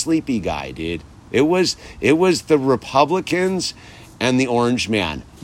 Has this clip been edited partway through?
no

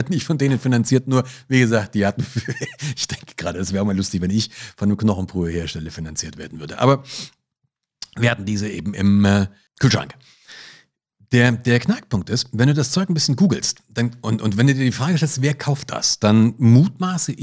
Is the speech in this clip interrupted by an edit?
no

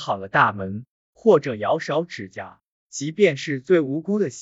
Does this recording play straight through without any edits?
yes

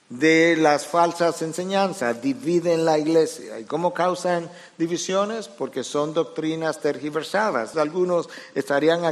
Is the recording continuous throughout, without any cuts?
no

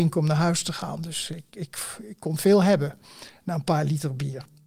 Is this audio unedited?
yes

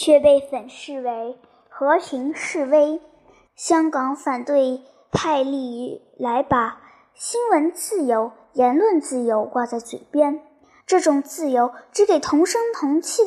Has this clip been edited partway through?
yes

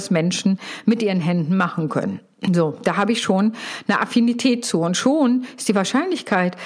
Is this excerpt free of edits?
yes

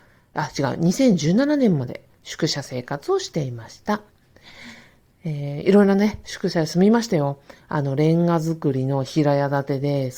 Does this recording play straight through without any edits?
yes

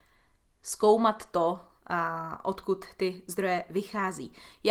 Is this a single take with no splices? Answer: yes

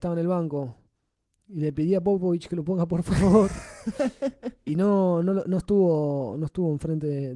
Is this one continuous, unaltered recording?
yes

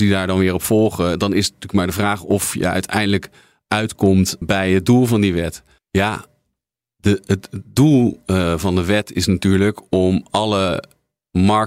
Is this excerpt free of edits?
no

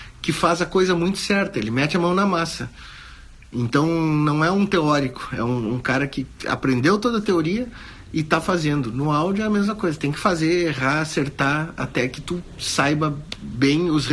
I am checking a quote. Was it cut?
no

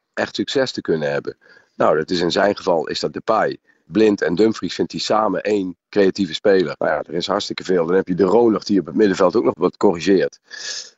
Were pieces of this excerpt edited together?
yes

